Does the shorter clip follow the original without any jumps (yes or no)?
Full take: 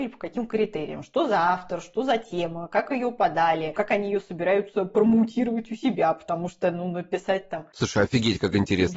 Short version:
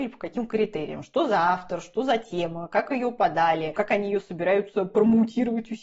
yes